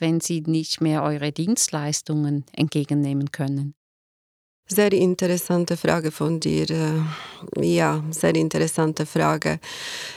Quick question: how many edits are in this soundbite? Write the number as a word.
zero